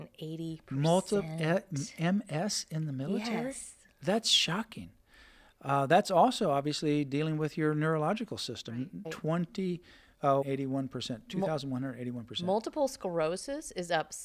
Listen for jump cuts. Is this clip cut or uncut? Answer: cut